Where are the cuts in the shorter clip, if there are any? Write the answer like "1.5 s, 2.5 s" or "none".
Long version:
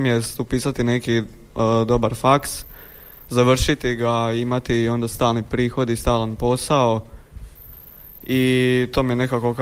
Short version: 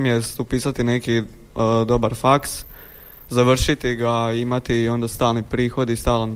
none